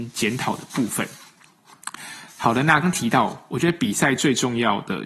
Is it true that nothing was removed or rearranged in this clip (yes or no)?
no